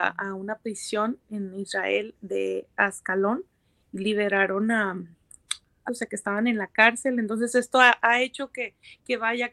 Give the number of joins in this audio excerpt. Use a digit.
1